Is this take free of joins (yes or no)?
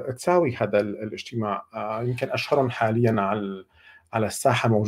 yes